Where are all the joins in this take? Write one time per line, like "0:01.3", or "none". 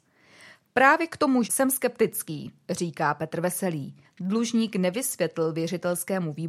0:01.4
0:04.0